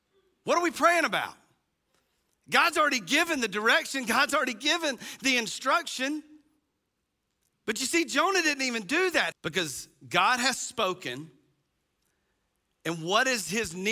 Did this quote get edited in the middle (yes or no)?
yes